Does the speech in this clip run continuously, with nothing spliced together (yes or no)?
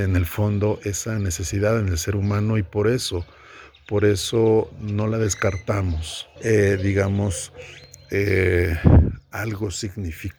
no